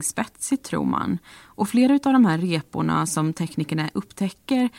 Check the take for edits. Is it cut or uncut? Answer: uncut